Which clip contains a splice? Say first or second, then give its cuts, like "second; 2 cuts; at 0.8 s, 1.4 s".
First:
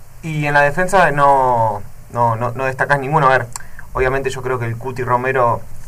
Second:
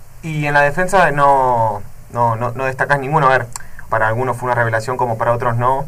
second; 1 cut; at 3.9 s